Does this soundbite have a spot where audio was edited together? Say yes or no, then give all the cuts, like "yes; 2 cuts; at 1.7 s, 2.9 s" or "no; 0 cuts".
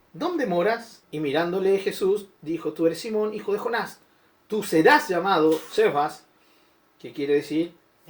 yes; 1 cut; at 1.0 s